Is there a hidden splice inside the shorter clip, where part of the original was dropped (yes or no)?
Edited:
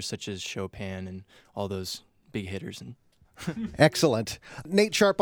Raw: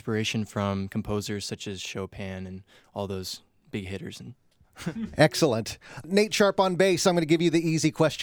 no